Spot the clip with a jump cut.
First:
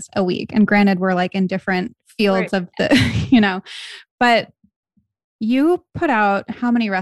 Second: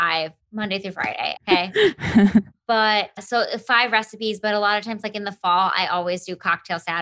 second; 1 cut; at 1.4 s

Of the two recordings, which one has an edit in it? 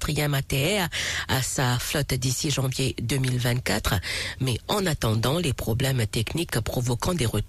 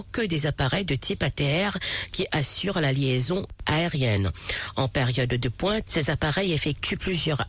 second; 1 cut; at 5.9 s

